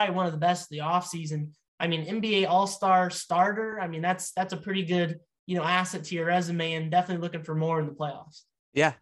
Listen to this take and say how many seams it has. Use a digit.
0